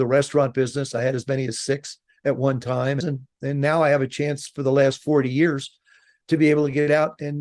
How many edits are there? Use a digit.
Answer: 1